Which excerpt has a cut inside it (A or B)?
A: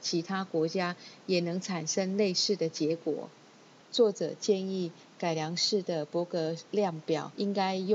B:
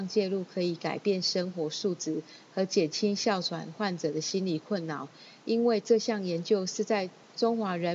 A